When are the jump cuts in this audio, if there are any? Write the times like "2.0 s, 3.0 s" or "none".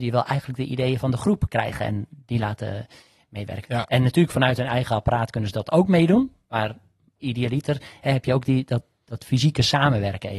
3.6 s